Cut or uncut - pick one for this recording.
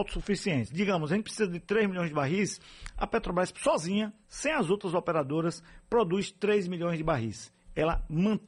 uncut